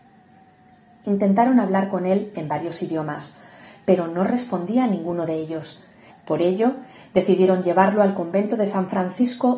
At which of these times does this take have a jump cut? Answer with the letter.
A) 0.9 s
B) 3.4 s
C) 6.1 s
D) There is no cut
C